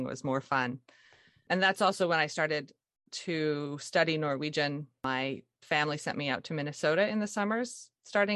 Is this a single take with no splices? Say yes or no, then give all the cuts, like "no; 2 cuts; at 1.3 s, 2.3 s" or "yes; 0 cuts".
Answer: yes; 0 cuts